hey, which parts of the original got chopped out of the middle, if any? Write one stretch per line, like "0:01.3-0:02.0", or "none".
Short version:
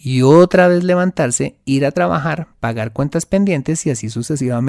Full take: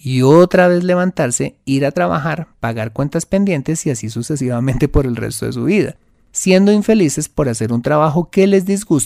none